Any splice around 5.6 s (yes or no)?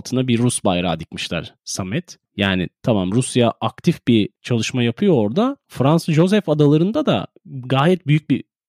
no